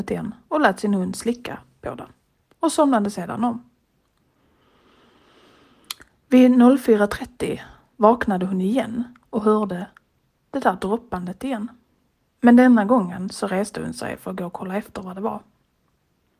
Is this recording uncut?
yes; 0 cuts

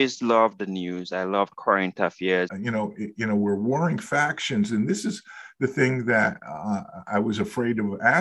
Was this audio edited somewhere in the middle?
yes; 1 cut; at 2.5 s

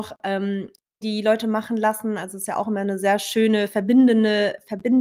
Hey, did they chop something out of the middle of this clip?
yes; 1 cut; at 1.0 s

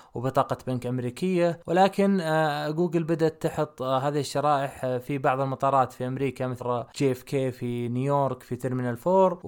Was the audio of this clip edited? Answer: yes; 1 cut; at 6.6 s

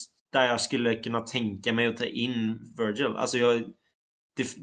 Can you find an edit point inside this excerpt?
no; 0 cuts

